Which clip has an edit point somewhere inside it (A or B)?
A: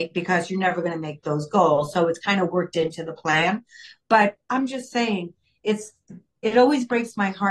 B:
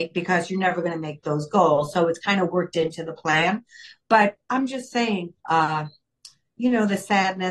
B